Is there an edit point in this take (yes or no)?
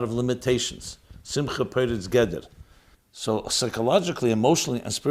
yes